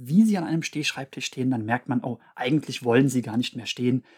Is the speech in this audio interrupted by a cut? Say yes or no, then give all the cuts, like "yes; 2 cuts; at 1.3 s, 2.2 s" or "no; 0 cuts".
yes; 1 cut; at 2.3 s